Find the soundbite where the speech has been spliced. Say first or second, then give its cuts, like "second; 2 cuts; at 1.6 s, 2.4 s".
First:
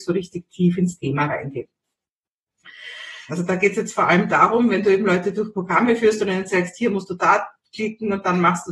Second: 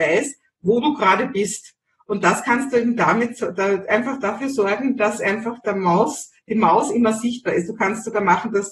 first; 1 cut; at 3.3 s